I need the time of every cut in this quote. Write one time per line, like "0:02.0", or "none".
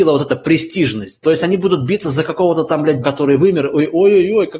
0:03.0